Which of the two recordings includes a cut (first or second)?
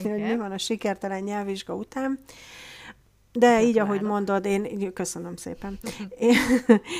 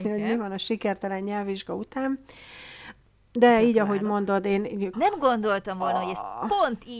second